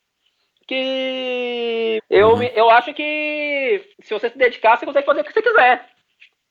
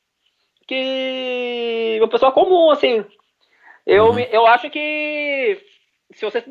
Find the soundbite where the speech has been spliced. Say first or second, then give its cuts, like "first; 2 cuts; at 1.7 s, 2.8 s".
first; 2 cuts; at 2.0 s, 3.9 s